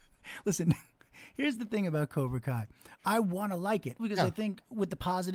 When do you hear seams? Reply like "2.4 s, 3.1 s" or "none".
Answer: 4.0 s